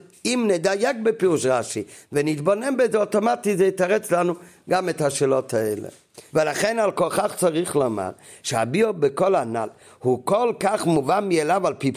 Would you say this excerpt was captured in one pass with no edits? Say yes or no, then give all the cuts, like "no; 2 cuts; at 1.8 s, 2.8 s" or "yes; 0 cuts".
no; 1 cut; at 6.3 s